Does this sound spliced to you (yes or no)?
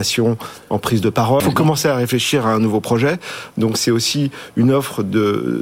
yes